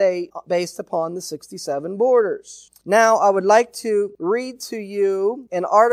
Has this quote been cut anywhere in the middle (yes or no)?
no